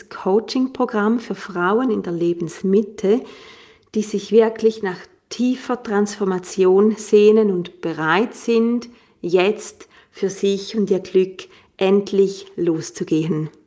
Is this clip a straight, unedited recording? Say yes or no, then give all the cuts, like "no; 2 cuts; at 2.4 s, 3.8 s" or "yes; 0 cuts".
yes; 0 cuts